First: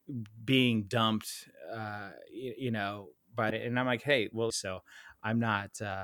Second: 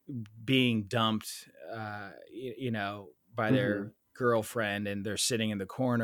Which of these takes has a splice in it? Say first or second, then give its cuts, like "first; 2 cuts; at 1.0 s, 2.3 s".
first; 2 cuts; at 3.5 s, 4.5 s